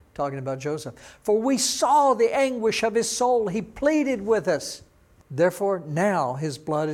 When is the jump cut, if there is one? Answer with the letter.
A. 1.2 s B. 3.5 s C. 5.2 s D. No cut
C